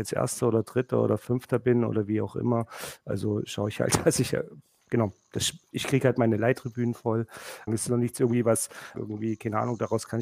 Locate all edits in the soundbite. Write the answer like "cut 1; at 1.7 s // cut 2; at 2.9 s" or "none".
cut 1; at 5.7 s // cut 2; at 7.7 s // cut 3; at 8.9 s